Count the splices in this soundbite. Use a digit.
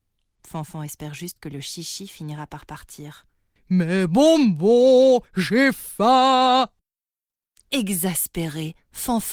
1